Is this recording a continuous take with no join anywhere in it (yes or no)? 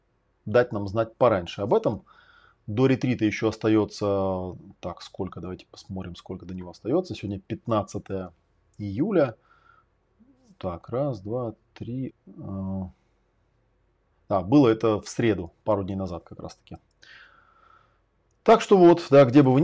no